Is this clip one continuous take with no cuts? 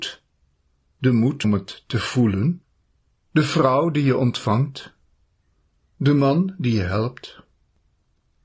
no; 1 cut; at 3.2 s

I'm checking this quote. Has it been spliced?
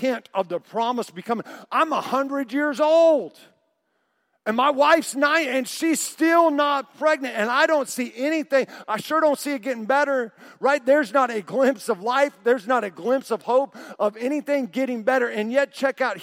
no; 0 cuts

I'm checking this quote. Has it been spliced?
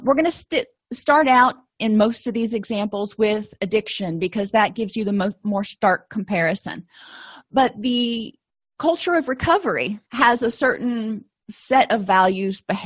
yes; 1 cut; at 10.0 s

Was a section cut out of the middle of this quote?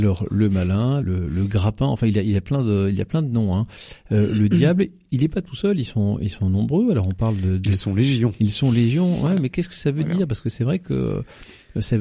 yes; 1 cut; at 1.0 s

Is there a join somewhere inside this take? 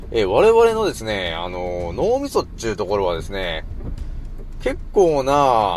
no; 0 cuts

